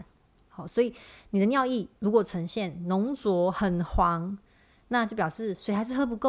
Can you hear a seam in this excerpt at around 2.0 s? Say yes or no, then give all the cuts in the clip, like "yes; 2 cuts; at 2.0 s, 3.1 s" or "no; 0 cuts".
yes; 1 cut; at 2.0 s